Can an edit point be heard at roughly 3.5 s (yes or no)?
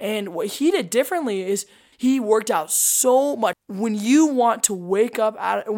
yes